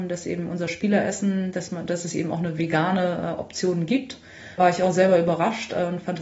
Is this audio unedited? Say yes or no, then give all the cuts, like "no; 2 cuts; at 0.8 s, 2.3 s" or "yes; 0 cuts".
no; 1 cut; at 4.6 s